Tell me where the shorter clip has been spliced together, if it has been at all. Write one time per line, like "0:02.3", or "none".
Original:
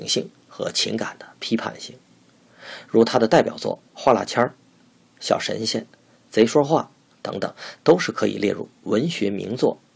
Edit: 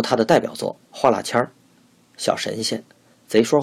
none